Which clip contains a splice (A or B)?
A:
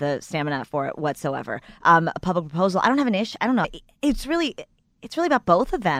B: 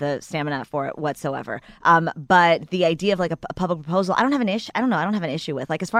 A